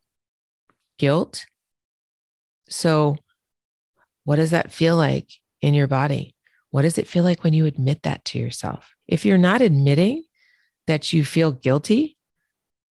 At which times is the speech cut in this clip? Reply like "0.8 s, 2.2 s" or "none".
9.0 s